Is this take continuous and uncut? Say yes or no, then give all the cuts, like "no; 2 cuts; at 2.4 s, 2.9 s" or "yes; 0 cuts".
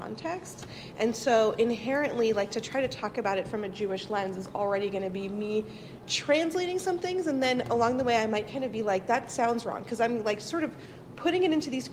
yes; 0 cuts